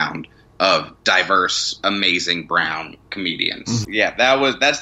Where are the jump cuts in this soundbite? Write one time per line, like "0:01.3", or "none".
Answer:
0:03.8